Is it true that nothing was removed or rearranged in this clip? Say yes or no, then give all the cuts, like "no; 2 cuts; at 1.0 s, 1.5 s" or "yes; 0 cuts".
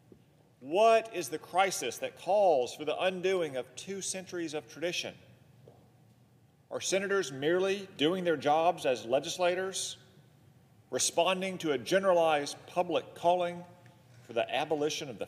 yes; 0 cuts